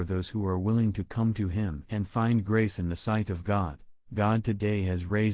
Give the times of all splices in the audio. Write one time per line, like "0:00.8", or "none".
0:04.1